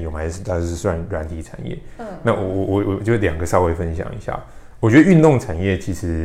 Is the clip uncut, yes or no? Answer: yes